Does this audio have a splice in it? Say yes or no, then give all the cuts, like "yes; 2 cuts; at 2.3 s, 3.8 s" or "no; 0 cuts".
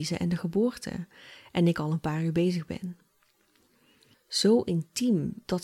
yes; 1 cut; at 4.1 s